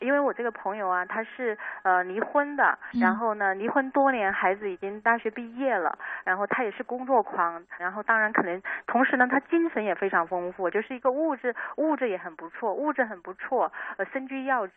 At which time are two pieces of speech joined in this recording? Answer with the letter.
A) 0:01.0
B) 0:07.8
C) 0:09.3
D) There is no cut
B